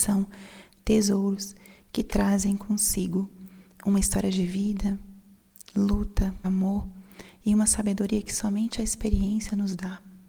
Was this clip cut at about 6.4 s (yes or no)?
yes